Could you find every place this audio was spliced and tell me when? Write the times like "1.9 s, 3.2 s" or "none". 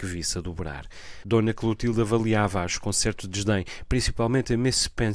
1.2 s